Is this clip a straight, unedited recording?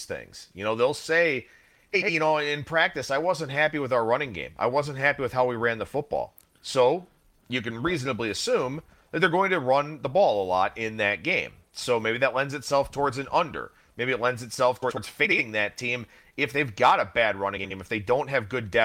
yes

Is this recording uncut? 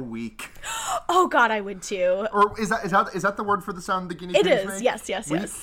yes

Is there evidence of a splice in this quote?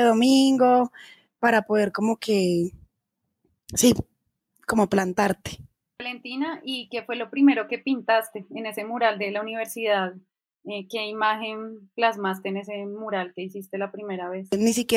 no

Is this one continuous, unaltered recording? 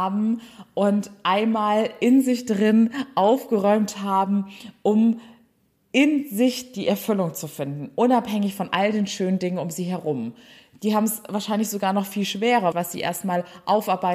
no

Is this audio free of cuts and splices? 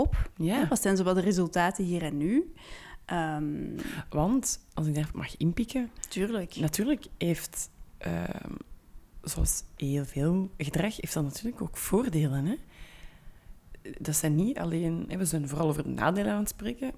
no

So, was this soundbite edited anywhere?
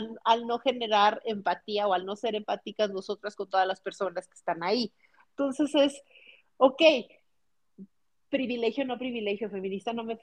no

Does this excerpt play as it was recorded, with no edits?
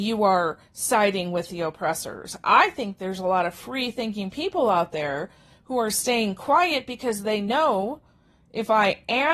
yes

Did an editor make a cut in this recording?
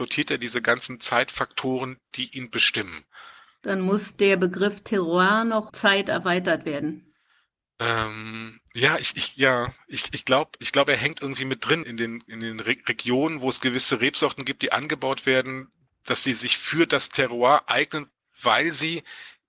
yes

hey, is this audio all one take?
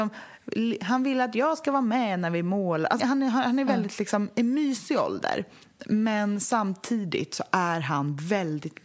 no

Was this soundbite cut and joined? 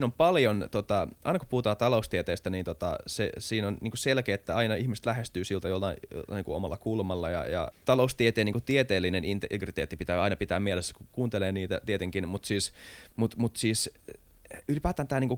yes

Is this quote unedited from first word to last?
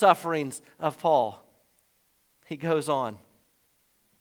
yes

